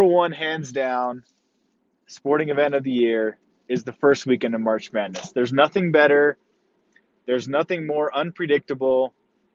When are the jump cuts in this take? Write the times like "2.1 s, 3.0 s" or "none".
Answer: none